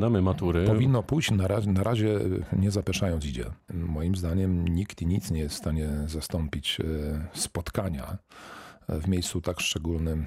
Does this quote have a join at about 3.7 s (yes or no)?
yes